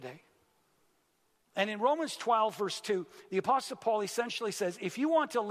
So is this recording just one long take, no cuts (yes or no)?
yes